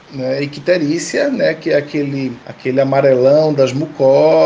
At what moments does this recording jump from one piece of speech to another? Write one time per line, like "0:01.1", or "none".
0:02.4